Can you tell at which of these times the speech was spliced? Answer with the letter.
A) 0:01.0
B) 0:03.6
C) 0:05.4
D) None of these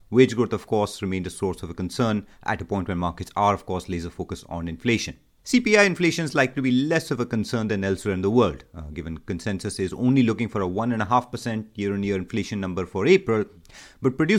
C